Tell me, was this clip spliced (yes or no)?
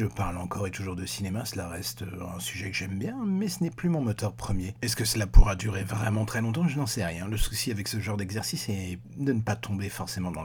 no